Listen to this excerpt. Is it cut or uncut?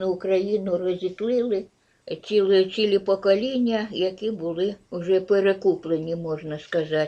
uncut